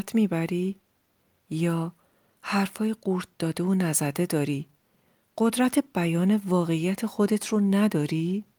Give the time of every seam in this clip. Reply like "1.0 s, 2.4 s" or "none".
none